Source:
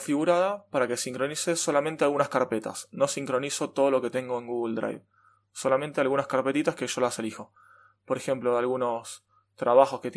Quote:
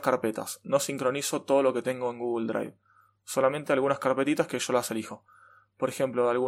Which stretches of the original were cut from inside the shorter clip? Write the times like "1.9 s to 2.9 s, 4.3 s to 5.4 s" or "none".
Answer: none